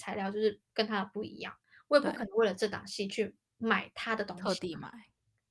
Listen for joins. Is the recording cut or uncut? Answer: uncut